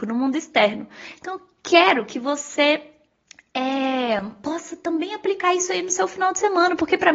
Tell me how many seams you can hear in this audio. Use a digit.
0